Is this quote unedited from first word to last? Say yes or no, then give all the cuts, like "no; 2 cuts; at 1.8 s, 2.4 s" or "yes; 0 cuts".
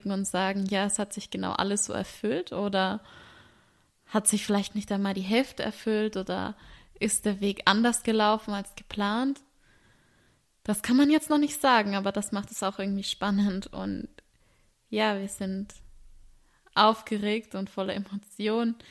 yes; 0 cuts